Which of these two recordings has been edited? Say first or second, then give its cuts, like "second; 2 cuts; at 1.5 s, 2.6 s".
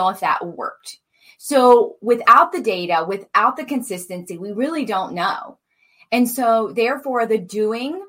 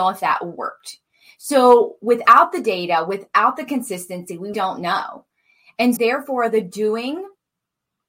second; 2 cuts; at 4.5 s, 6.0 s